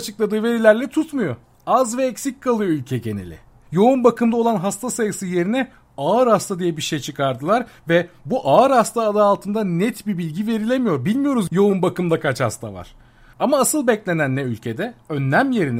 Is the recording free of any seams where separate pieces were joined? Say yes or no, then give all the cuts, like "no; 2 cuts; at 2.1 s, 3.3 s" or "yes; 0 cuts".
yes; 0 cuts